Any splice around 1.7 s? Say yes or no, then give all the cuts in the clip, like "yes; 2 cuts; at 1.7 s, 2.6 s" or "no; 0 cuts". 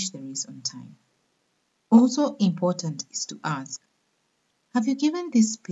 yes; 1 cut; at 1.7 s